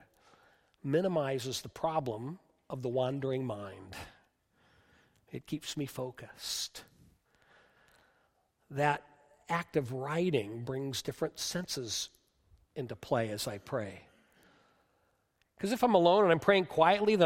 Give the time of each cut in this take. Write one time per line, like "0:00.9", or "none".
none